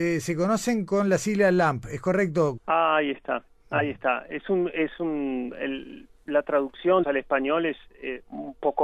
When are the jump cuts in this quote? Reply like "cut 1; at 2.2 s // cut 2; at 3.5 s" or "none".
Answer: cut 1; at 2.6 s // cut 2; at 7.0 s